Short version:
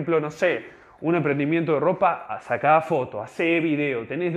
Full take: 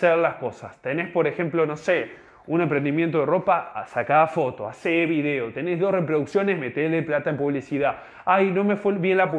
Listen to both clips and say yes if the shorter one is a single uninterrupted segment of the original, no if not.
yes